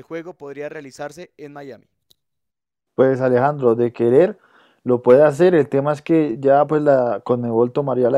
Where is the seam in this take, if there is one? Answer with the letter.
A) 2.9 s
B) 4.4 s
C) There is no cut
A